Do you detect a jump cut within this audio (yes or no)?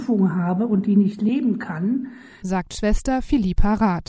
yes